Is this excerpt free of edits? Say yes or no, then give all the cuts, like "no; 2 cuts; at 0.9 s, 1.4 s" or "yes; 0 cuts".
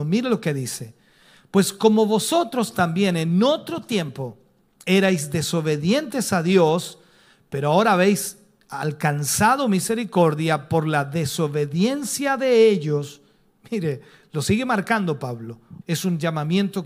no; 1 cut; at 15.8 s